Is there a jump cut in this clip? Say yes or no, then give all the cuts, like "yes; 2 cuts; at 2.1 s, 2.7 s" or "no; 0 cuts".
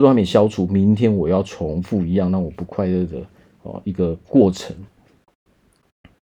no; 0 cuts